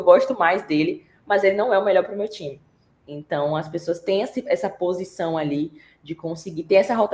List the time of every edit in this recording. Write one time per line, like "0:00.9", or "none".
0:02.9